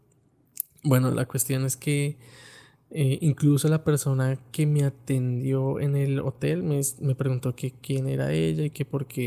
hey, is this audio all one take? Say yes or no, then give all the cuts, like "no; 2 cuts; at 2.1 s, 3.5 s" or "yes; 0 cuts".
yes; 0 cuts